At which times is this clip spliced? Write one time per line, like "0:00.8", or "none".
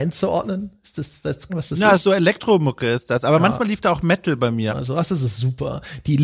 0:01.5
0:04.7